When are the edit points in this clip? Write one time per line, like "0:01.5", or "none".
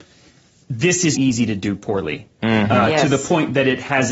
0:01.1

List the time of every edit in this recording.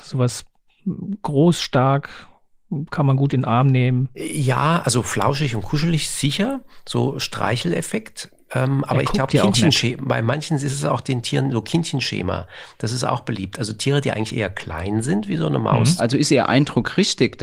0:16.0

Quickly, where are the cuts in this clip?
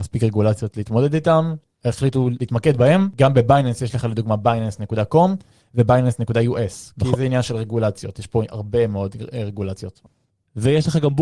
none

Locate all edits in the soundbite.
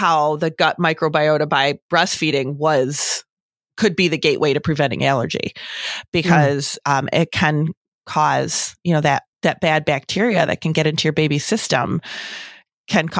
0:09.3

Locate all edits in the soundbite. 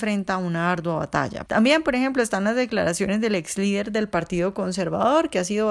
0:01.5

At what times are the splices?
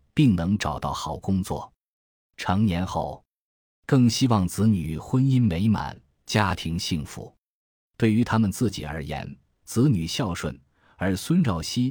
none

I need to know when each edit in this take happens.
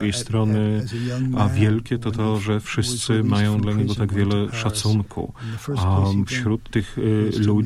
none

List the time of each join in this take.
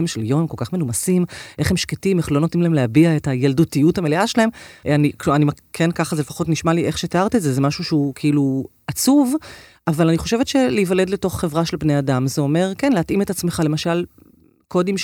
0:04.8

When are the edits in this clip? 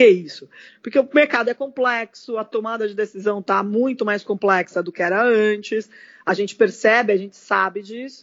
none

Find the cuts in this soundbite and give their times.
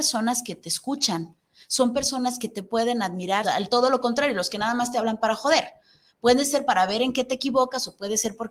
0:03.4

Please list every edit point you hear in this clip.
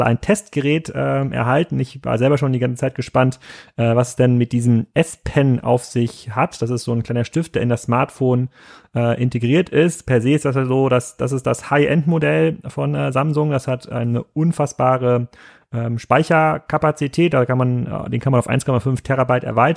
none

